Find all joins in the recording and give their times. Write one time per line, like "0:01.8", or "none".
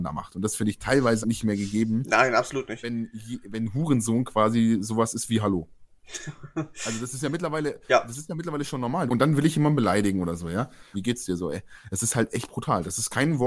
0:01.2
0:09.1
0:10.9